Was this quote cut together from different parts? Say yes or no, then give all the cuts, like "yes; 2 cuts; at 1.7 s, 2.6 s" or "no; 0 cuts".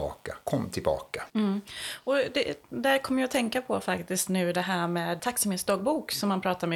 yes; 2 cuts; at 1.3 s, 5.2 s